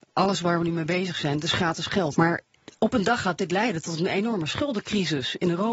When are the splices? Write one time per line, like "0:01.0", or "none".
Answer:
0:02.1